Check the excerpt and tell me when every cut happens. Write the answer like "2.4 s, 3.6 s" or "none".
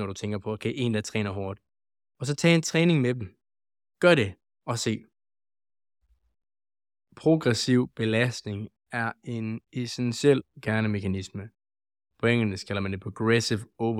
none